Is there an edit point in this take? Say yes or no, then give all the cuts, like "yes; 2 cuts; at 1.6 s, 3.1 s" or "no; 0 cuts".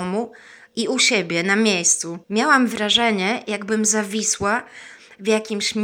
yes; 1 cut; at 2.2 s